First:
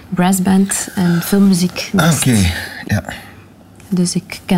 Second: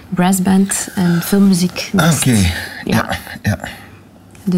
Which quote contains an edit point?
first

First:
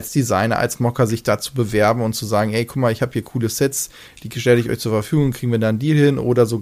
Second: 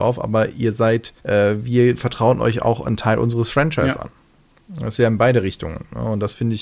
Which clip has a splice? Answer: second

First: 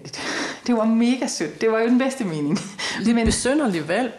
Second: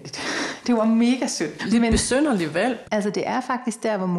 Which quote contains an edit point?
second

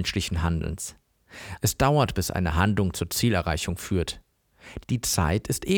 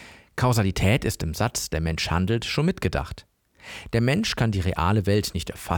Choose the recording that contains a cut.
first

